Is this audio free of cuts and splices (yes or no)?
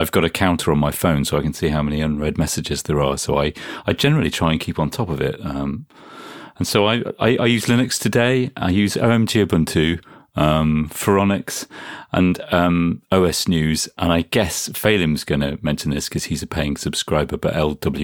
yes